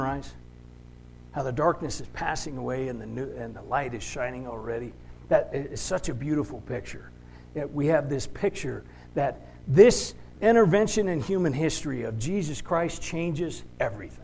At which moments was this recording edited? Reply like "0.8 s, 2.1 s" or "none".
10.3 s